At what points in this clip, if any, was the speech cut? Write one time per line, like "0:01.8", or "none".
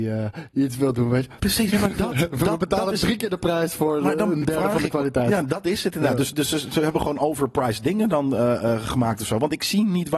0:01.7